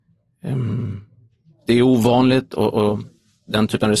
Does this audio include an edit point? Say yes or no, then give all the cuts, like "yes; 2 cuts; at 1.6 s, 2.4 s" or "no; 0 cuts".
no; 0 cuts